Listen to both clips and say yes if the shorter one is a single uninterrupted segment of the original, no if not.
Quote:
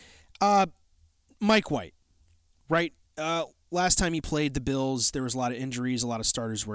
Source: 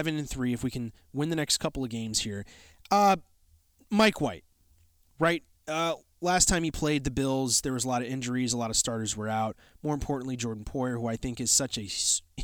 yes